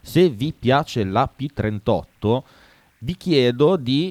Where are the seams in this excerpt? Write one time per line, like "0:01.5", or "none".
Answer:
none